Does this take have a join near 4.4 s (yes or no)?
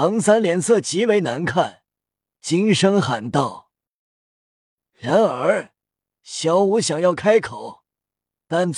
no